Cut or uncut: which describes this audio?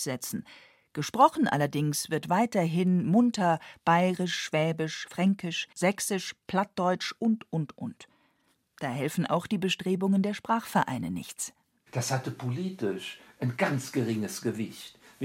cut